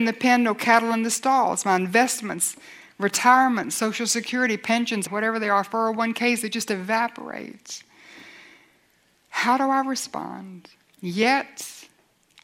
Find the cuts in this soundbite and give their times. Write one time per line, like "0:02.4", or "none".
0:05.1